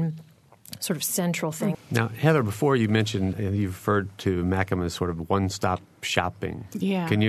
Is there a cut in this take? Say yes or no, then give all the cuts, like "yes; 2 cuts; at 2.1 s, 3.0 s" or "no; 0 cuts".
yes; 2 cuts; at 1.7 s, 3.3 s